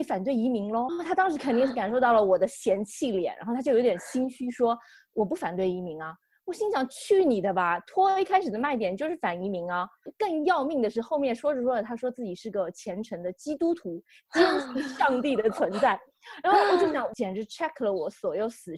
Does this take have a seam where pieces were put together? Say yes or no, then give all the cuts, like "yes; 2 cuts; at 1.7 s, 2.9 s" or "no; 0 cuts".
no; 0 cuts